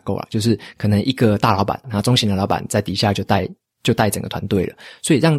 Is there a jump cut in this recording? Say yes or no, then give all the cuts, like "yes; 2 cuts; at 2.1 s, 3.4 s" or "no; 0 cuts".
yes; 1 cut; at 1.8 s